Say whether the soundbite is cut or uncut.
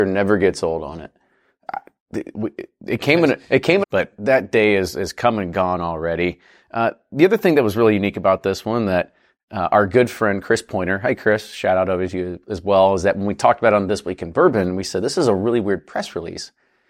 cut